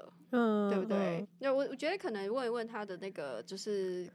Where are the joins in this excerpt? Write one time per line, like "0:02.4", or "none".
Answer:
0:01.2